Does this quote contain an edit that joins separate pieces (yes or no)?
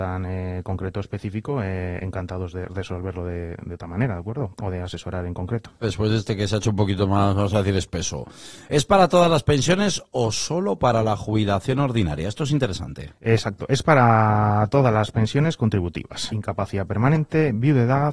yes